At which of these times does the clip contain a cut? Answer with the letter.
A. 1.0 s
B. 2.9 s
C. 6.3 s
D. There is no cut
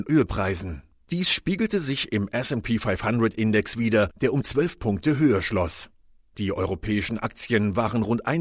C